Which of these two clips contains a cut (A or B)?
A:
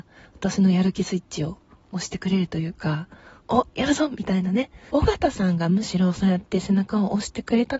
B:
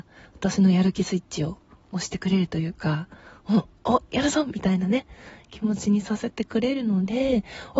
A